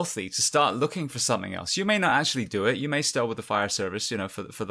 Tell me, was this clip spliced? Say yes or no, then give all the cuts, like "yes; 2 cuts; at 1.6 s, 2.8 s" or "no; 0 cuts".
no; 0 cuts